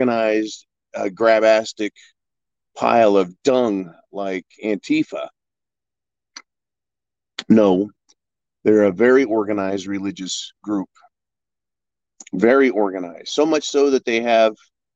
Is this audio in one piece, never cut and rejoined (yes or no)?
yes